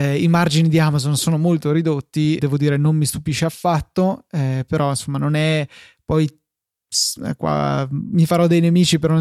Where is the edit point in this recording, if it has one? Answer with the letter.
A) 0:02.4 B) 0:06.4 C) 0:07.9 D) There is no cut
A